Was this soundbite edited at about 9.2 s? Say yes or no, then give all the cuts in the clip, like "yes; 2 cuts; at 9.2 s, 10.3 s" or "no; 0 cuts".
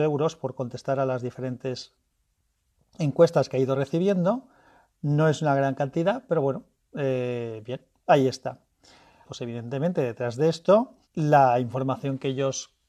yes; 2 cuts; at 9.2 s, 11.0 s